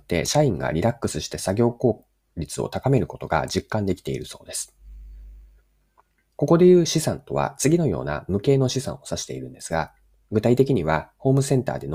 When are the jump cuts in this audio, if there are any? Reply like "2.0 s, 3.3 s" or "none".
6.3 s

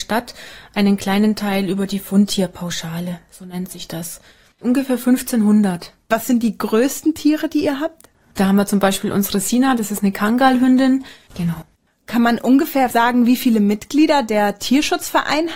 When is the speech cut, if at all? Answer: 4.5 s, 8.3 s, 11.3 s

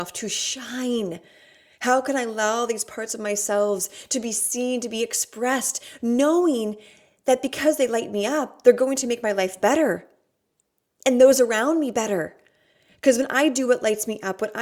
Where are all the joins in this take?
none

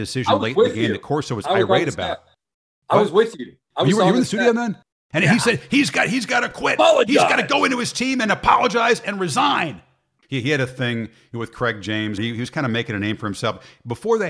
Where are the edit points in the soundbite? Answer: 10.2 s, 12.2 s

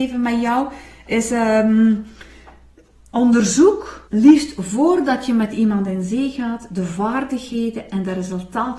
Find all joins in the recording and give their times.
4.1 s

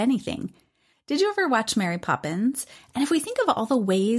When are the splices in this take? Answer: 0.9 s, 2.8 s

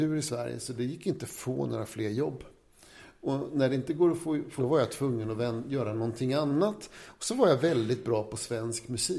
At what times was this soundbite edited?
4.6 s

